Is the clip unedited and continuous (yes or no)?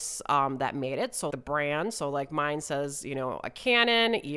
no